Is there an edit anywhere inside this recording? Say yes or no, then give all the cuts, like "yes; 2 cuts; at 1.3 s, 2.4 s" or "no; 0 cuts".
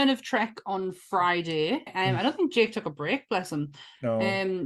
yes; 1 cut; at 1.9 s